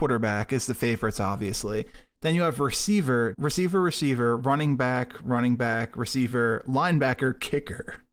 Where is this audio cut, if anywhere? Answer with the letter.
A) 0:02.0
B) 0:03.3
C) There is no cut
B